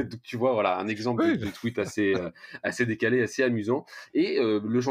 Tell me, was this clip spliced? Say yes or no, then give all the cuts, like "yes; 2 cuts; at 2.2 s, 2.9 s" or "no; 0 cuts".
no; 0 cuts